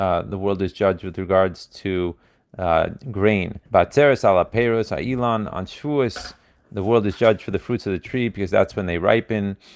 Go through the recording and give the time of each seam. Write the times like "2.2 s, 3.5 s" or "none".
3.7 s